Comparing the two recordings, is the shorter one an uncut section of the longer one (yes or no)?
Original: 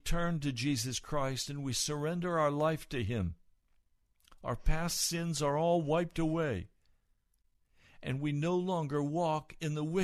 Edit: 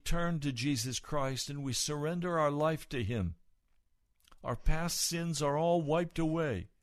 yes